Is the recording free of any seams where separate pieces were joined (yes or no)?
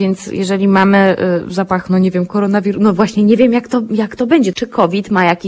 no